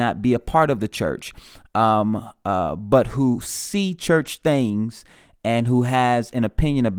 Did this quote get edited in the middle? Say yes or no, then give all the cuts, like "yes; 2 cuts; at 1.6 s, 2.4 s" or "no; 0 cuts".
no; 0 cuts